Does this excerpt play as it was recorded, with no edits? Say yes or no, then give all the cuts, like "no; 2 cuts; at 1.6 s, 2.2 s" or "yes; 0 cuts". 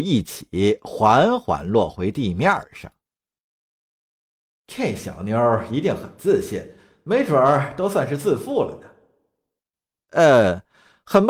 yes; 0 cuts